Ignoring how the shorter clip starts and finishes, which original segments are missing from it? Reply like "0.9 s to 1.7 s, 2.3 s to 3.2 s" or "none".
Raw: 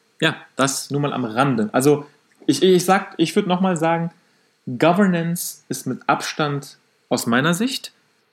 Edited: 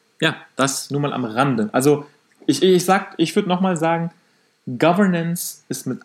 none